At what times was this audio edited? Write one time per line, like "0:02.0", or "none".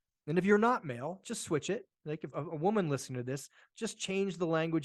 0:02.3